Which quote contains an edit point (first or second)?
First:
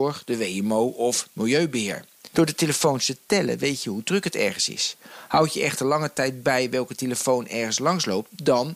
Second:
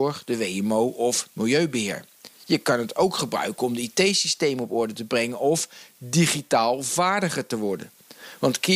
first